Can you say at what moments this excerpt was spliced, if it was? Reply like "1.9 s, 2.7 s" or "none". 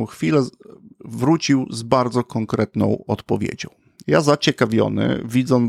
4.0 s